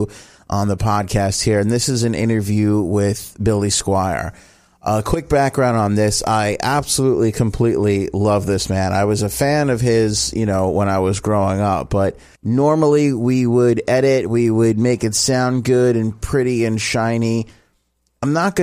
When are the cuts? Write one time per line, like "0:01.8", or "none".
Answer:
0:12.4